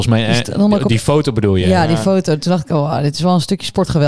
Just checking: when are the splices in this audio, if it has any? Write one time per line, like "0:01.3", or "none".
none